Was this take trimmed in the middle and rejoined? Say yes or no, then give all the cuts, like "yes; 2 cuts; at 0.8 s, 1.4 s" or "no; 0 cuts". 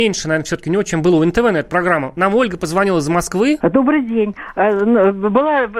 yes; 1 cut; at 3.6 s